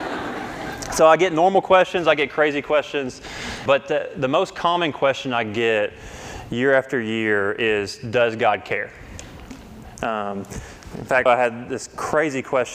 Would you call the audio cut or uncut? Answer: cut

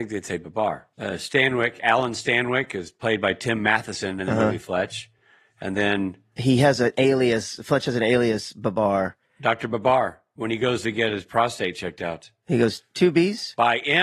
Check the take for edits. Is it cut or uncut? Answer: uncut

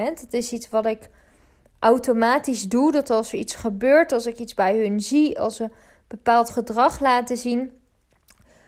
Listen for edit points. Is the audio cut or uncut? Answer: uncut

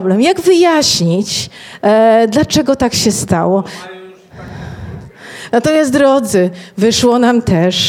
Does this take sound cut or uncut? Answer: cut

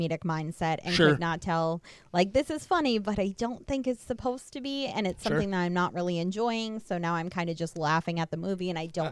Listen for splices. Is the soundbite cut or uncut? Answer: uncut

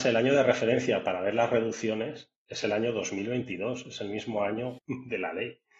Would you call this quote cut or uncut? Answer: cut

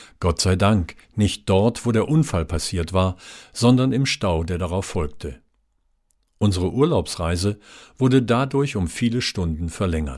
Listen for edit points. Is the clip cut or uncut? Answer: uncut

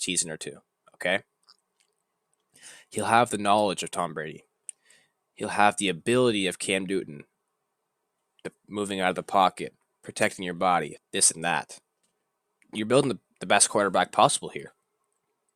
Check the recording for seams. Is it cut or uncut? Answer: cut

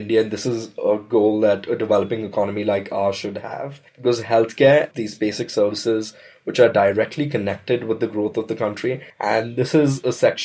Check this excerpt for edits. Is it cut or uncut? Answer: cut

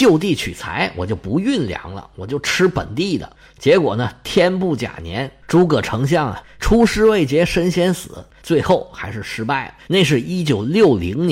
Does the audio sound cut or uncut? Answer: cut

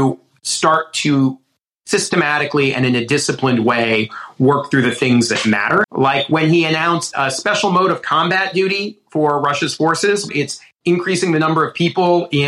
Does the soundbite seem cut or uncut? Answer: cut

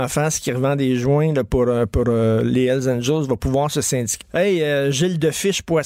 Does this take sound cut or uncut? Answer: cut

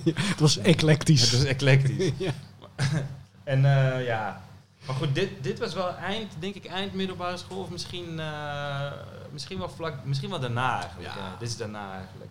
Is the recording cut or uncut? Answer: uncut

